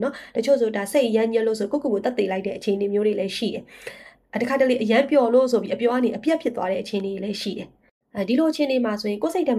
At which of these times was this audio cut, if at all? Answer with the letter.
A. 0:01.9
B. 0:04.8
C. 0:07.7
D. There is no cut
D